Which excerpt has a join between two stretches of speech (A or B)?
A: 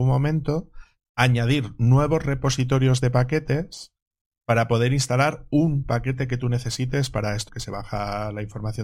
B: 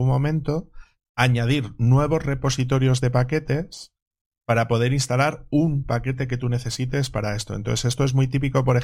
A